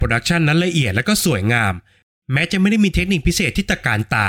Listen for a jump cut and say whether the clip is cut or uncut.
uncut